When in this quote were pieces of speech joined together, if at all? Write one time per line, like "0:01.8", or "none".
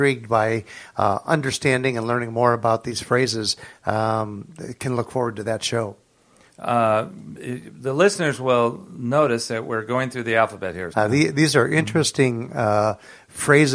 0:06.5
0:10.9